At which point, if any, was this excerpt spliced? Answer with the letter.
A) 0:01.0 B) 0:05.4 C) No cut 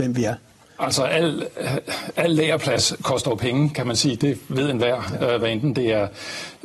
C